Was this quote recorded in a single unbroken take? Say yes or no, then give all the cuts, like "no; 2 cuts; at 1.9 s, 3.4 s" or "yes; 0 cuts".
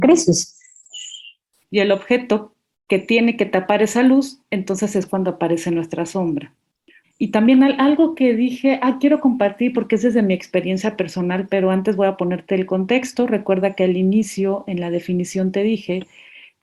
no; 2 cuts; at 1.6 s, 7.0 s